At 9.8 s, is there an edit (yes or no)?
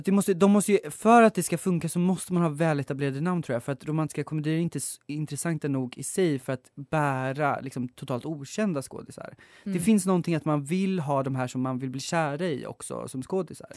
no